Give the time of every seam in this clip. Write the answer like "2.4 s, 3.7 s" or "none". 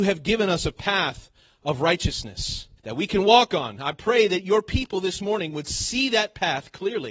2.8 s